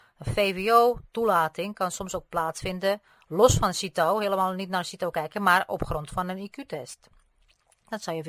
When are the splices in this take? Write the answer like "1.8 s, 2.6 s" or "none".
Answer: none